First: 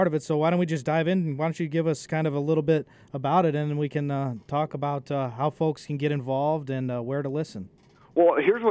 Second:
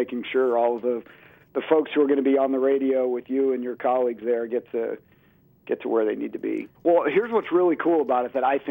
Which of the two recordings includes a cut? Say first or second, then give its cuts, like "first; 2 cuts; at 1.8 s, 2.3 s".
second; 1 cut; at 6.7 s